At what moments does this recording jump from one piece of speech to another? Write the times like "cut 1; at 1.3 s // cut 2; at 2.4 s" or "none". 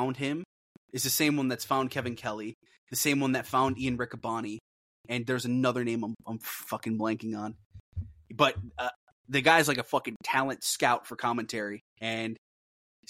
cut 1; at 11.9 s